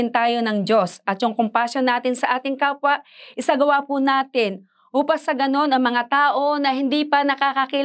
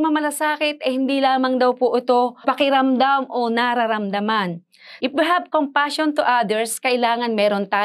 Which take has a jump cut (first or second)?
second